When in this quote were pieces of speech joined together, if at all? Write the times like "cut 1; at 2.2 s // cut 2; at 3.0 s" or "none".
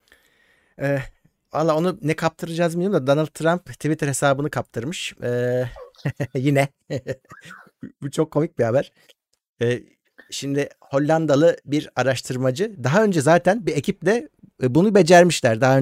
none